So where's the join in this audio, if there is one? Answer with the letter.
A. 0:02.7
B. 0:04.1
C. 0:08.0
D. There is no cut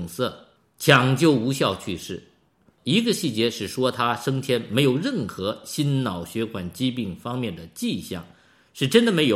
A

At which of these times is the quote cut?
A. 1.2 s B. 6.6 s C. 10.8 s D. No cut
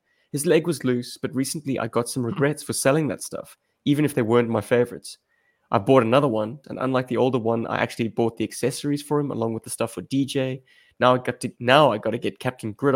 B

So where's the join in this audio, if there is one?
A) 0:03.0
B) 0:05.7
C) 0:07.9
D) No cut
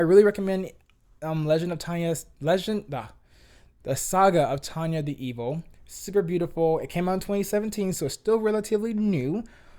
B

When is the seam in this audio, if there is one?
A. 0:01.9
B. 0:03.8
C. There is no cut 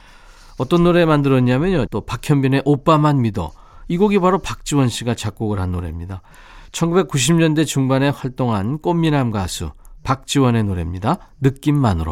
A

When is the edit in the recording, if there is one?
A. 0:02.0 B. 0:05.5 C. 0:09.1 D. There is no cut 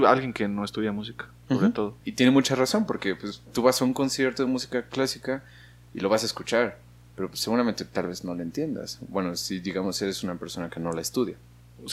A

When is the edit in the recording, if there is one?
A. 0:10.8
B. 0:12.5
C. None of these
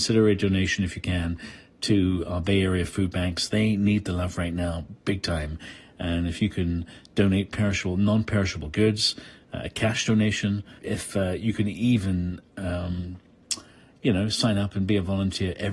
A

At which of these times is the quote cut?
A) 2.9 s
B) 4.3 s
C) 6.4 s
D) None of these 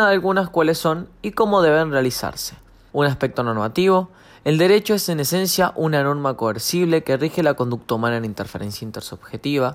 A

